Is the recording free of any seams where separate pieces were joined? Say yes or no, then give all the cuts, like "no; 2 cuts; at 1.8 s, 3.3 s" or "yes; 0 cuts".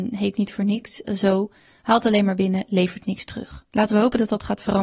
yes; 0 cuts